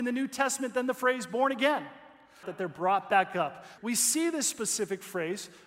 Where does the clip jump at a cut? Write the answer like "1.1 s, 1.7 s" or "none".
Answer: 2.4 s, 3.8 s